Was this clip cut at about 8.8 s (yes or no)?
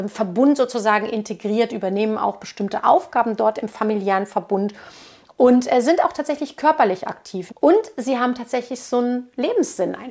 no